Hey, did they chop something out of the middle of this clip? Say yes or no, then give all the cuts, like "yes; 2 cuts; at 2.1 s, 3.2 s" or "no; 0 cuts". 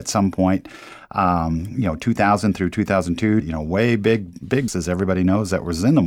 yes; 2 cuts; at 3.4 s, 4.7 s